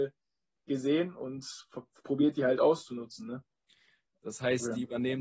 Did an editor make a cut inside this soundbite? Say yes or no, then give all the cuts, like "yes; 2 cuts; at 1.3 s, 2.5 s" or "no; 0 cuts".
yes; 1 cut; at 4.1 s